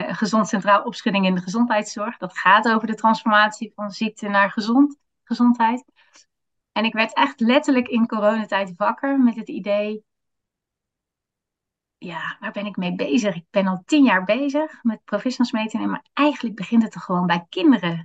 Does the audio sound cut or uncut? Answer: uncut